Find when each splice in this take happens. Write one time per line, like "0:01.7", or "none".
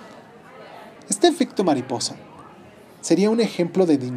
0:01.0